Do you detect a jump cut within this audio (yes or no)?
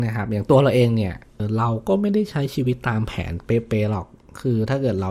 yes